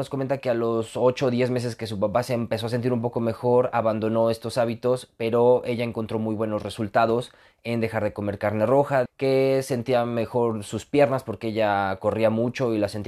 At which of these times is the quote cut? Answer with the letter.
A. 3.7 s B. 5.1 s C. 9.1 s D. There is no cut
C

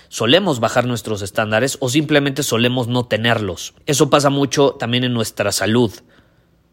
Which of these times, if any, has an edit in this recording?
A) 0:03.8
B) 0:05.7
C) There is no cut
A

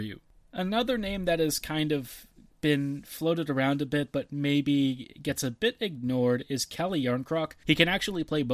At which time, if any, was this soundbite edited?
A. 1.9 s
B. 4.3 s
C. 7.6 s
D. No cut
C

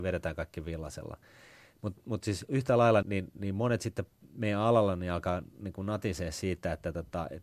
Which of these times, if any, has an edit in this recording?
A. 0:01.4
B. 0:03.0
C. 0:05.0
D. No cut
B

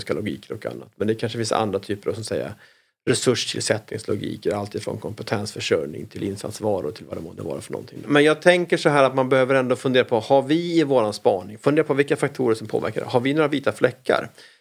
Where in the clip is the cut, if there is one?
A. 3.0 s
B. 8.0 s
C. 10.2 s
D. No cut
B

